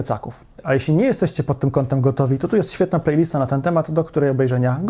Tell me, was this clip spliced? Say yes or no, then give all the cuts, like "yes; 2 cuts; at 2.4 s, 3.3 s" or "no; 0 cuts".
no; 0 cuts